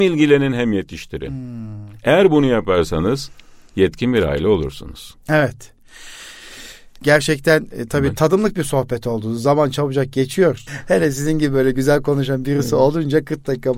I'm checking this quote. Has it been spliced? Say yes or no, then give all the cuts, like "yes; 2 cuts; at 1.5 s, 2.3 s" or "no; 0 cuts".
yes; 3 cuts; at 5.2 s, 7.0 s, 10.7 s